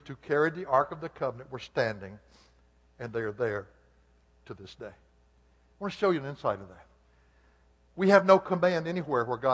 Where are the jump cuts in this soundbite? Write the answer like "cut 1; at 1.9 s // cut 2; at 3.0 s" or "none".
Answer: none